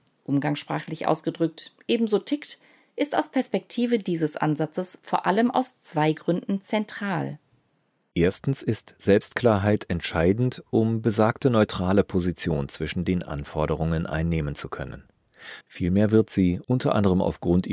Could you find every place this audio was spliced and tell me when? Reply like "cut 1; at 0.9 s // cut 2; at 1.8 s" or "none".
cut 1; at 15.6 s